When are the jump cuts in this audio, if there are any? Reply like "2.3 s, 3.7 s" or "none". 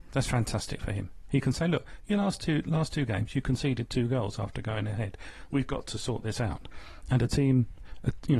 1.2 s